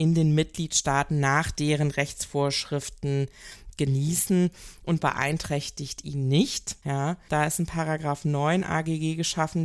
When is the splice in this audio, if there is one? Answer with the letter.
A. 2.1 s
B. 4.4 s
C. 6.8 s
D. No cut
C